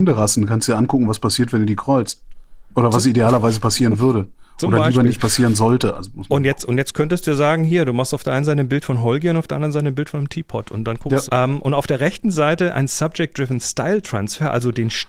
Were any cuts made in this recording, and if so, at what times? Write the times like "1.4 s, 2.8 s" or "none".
11.3 s